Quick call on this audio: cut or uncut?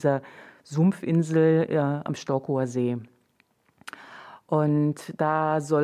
uncut